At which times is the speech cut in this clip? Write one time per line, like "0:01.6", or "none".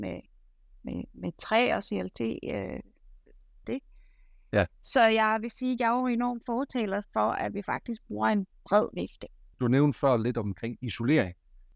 0:03.6
0:09.5